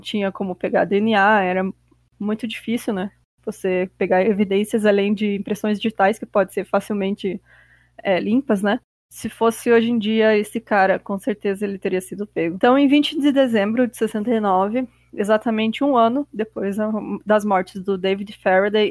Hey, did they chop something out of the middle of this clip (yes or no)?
no